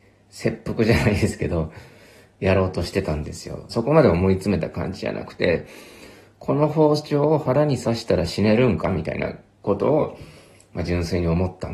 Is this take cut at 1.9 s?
no; 1 cut; at 3.7 s

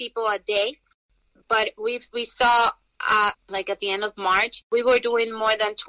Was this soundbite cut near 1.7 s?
no; 1 cut; at 3.3 s

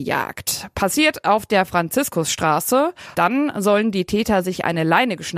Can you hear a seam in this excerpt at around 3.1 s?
yes; 1 cut; at 3.1 s

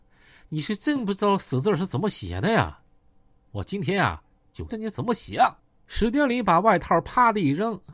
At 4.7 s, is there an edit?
yes; 1 cut; at 4.7 s

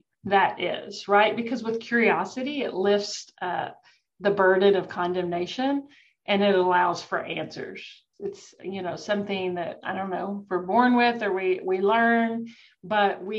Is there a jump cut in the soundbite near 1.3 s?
no; 1 cut; at 8.1 s

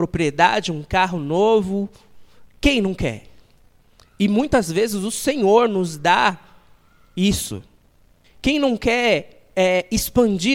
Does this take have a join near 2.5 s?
no; 0 cuts

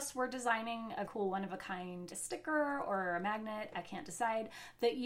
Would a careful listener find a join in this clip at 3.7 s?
no; 2 cuts; at 1.1 s, 2.1 s

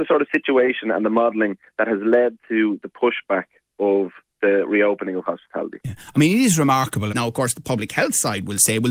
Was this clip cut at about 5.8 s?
no; 1 cut; at 7.1 s

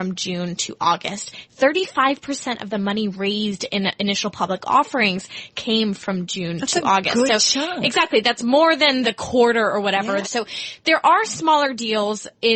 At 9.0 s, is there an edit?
yes; 2 cuts; at 9.0 s, 10.2 s

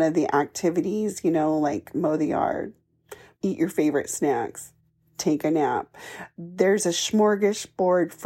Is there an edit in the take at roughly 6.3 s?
no; 1 cut; at 3.3 s

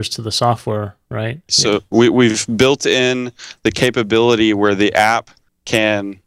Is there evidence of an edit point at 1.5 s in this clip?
yes; 1 cut; at 1.5 s

